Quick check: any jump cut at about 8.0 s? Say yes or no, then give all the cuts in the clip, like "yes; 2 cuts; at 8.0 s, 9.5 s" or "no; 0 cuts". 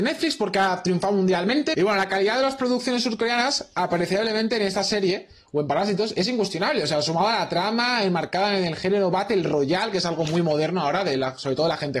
no; 1 cut; at 1.7 s